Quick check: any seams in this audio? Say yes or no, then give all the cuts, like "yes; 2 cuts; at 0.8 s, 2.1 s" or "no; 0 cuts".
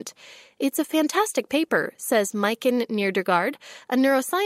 no; 0 cuts